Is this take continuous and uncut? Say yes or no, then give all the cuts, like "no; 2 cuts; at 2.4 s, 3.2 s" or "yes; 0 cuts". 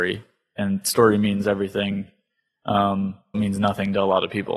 no; 1 cut; at 3.3 s